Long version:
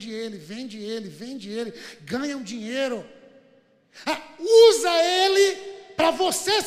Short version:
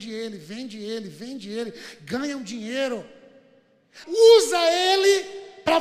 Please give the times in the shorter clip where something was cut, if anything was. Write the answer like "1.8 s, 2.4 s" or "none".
4.0 s